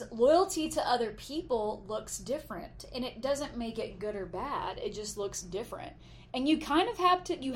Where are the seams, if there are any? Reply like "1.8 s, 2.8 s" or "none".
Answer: none